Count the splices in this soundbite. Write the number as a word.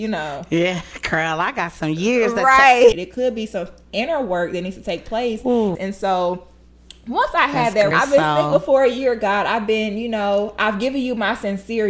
three